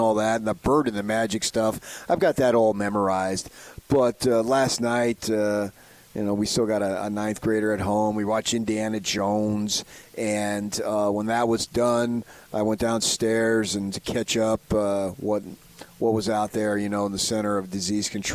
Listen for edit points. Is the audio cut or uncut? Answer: cut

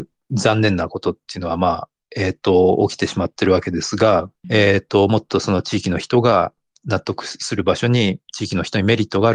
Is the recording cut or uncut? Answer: cut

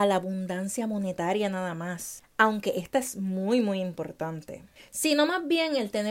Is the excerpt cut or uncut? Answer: uncut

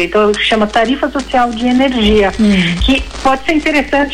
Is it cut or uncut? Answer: uncut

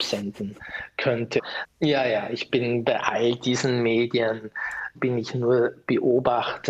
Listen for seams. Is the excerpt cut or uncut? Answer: cut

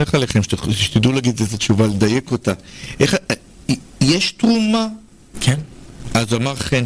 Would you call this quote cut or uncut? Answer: cut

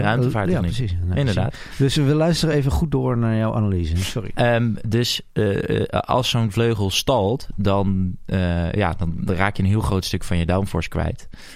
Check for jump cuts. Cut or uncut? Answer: uncut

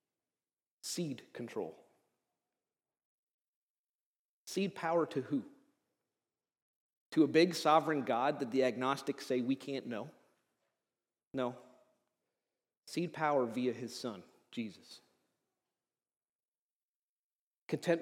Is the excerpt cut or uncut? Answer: uncut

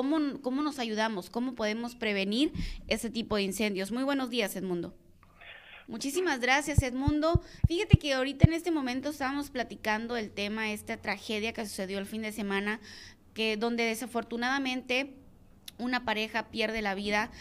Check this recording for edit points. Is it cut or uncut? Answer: cut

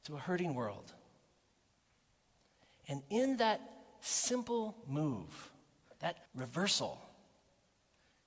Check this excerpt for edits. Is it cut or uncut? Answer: cut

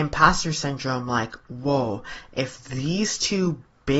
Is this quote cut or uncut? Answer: uncut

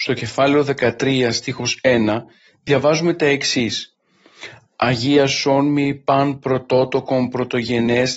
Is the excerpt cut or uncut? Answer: uncut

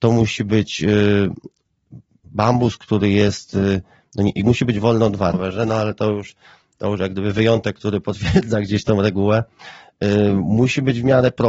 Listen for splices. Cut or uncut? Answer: cut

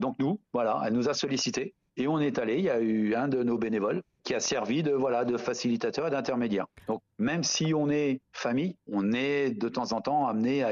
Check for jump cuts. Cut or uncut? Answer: cut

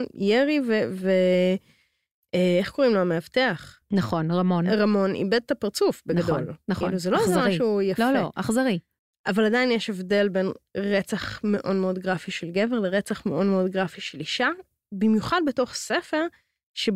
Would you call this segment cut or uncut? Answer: uncut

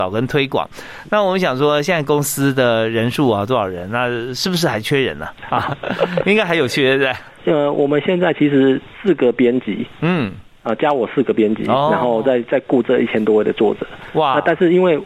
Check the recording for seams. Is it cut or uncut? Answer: uncut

